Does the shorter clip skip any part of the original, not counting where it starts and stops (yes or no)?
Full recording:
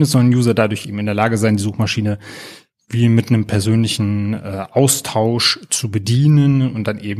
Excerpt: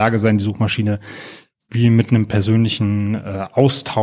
no